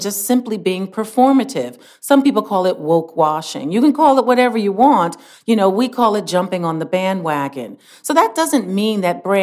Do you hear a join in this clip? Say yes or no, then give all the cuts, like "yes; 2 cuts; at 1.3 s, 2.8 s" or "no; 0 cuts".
no; 0 cuts